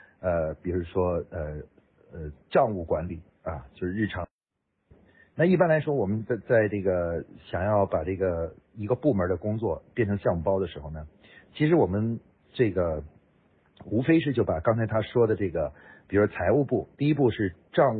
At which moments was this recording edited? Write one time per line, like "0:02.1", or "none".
0:04.9